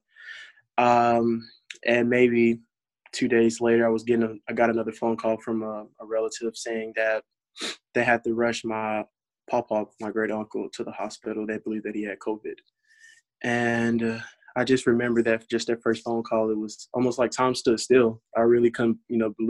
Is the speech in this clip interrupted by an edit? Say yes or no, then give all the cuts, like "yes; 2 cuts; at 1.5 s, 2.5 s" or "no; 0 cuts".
no; 0 cuts